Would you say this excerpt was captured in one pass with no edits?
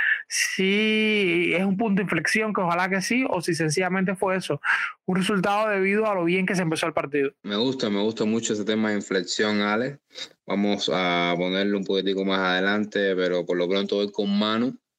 no; 1 cut; at 7.4 s

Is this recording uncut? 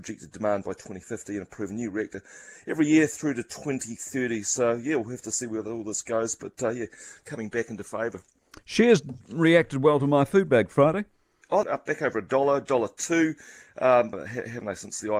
no; 2 cuts; at 11.6 s, 14.1 s

